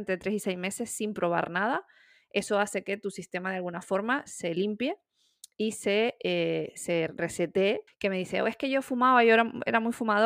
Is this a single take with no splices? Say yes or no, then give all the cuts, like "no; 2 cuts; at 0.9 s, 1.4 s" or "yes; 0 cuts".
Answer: no; 1 cut; at 7.9 s